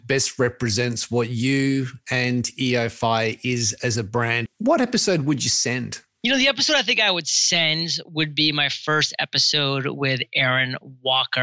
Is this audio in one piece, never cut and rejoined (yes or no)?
no